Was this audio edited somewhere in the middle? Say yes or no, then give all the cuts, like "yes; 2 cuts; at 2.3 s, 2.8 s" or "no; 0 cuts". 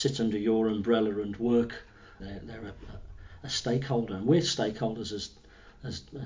yes; 1 cut; at 2.2 s